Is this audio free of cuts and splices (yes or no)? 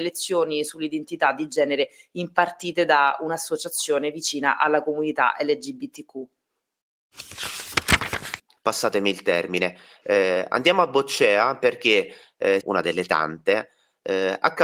no